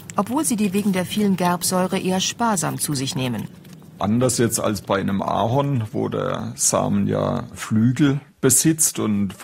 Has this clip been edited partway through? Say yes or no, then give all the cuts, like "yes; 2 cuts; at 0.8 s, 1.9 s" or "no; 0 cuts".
yes; 1 cut; at 4.0 s